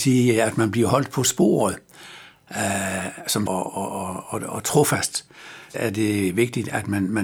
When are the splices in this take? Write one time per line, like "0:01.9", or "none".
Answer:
0:03.5
0:05.7